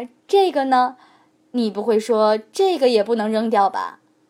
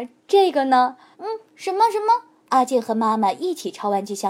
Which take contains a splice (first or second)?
second